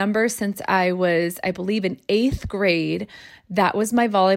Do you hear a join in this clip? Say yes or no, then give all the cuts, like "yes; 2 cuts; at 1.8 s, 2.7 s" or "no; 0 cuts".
no; 0 cuts